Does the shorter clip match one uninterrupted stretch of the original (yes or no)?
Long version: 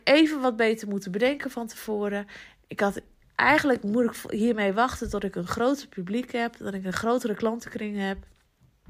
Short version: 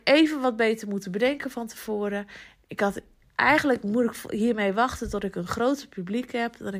yes